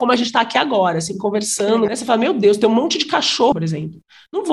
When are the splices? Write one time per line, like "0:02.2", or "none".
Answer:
0:01.9
0:03.5